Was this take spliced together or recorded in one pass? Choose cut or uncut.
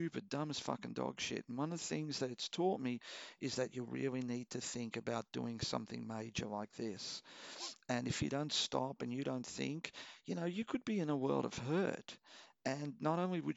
uncut